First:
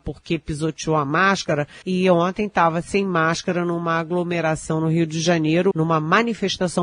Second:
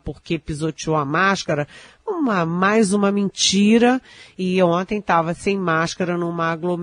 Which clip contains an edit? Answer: first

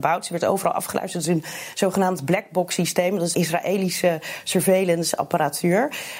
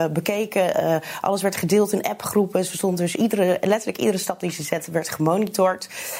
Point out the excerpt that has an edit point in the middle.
first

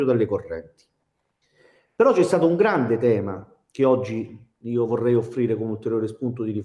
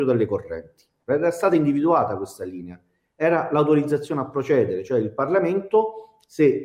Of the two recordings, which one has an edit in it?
second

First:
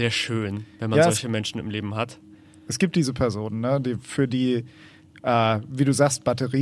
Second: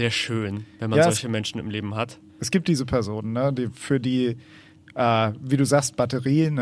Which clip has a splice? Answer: second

